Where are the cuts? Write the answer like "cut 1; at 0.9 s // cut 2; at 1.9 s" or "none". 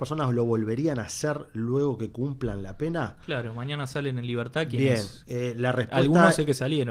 none